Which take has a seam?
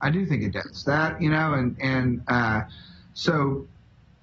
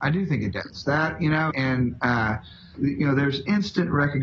second; 2 cuts; at 1.5 s, 2.7 s

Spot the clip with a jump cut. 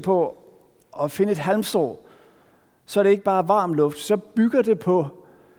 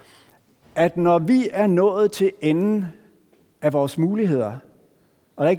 first; 1 cut; at 1.0 s

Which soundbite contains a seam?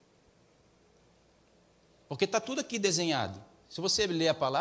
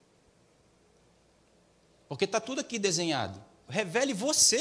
second; 1 cut; at 3.7 s

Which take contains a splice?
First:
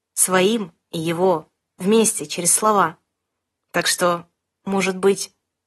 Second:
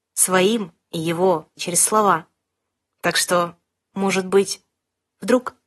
second; 1 cut; at 1.6 s

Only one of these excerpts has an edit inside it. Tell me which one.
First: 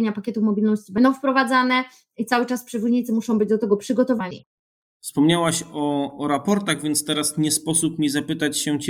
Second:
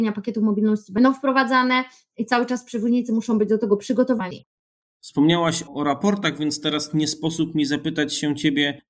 second; 1 cut; at 5.7 s

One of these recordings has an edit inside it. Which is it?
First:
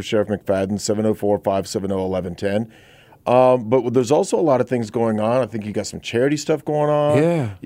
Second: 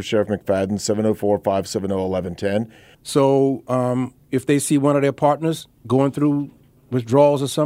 second; 2 cuts; at 2.9 s, 5.8 s

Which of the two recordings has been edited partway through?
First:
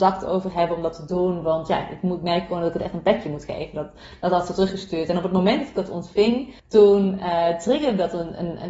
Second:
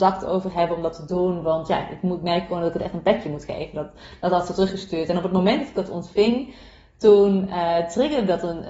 first; 1 cut; at 6.6 s

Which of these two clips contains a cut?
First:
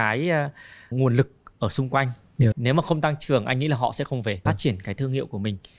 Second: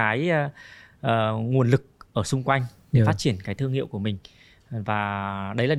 first; 3 cuts; at 0.9 s, 2.5 s, 4.5 s

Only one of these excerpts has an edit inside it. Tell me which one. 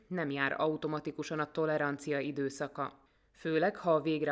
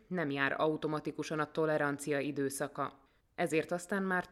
second; 1 cut; at 3.2 s

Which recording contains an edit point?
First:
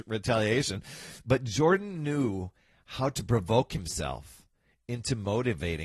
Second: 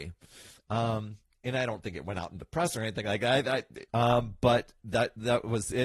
second; 1 cut; at 3.9 s

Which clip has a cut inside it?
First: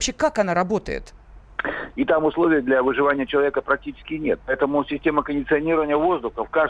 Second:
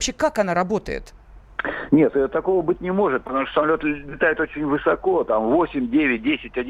first; 1 cut; at 1.9 s

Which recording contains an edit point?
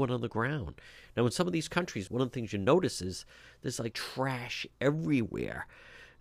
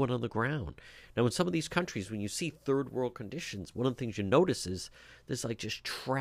first; 2 cuts; at 2.1 s, 3.9 s

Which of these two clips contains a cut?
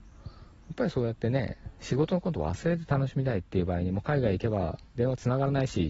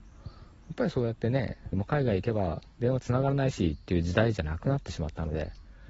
second; 1 cut; at 1.7 s

